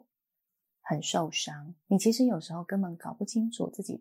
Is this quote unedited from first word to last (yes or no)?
no